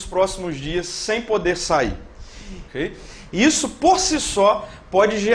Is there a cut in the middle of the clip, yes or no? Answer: yes